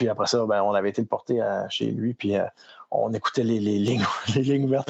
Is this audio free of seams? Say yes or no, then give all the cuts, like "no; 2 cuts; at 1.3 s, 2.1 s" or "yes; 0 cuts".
yes; 0 cuts